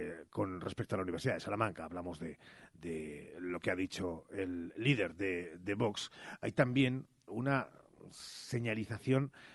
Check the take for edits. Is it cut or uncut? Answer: cut